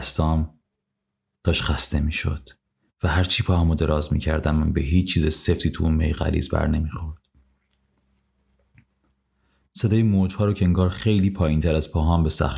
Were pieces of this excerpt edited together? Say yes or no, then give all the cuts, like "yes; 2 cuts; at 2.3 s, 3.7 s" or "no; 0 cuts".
no; 0 cuts